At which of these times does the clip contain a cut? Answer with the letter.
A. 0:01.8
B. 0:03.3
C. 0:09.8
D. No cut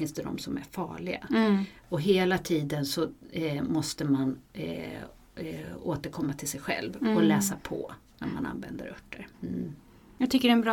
D